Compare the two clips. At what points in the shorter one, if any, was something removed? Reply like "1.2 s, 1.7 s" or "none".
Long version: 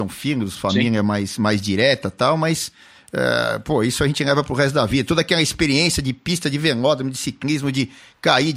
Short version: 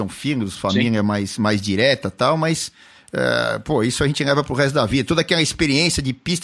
none